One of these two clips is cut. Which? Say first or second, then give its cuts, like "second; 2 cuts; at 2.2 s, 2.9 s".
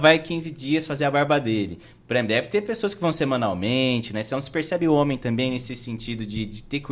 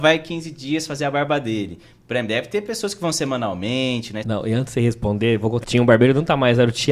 second; 2 cuts; at 4.2 s, 5.6 s